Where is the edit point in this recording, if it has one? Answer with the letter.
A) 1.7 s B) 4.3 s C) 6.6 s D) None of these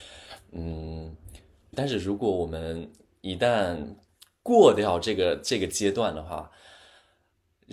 A